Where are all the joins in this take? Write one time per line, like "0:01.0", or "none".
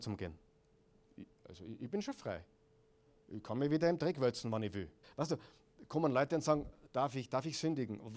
0:05.0
0:06.9